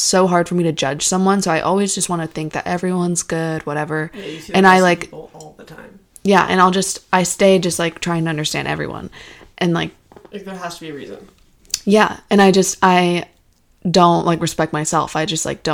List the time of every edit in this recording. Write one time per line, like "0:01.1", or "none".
none